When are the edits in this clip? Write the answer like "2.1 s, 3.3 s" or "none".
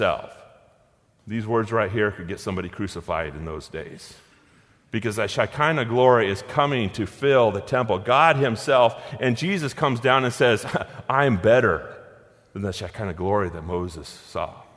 1.2 s